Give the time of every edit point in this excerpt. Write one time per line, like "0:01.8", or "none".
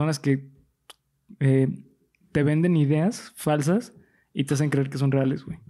none